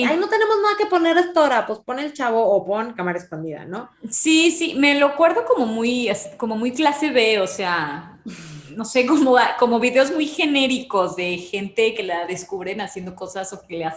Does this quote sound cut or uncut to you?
uncut